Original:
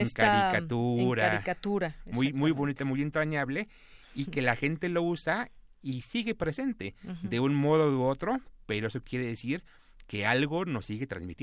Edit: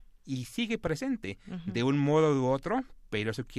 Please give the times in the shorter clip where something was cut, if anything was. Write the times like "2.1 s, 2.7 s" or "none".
none